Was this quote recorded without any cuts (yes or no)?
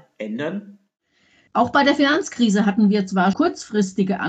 no